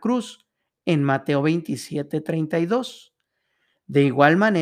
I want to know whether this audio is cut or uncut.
uncut